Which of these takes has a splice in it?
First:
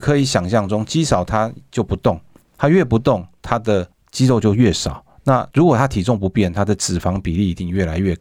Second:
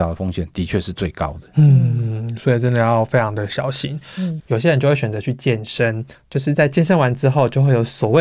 second; 2 cuts; at 4.4 s, 6.1 s

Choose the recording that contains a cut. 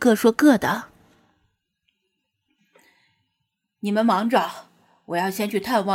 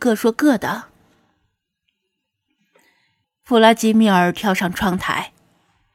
second; 1 cut; at 3.2 s

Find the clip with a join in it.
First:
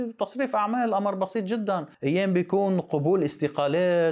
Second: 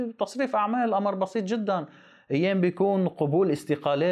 first; 1 cut; at 1.9 s

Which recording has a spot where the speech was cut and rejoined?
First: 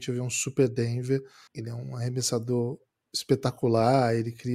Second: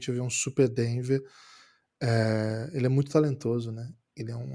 first; 1 cut; at 1.5 s

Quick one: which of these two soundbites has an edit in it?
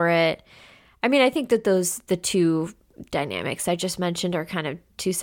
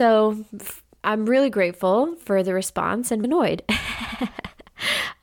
second; 1 cut; at 3.2 s

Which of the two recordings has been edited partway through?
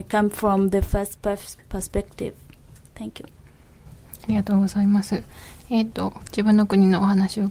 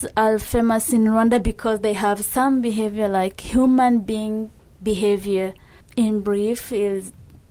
first; 1 cut; at 5.9 s

